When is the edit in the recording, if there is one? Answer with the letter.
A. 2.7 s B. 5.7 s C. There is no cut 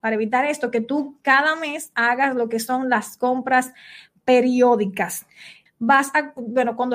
B